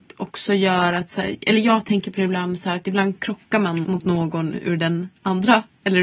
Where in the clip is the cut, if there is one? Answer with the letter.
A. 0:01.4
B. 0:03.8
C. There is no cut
B